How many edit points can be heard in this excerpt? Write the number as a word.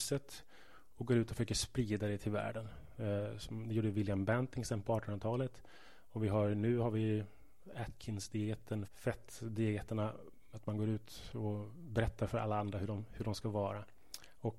two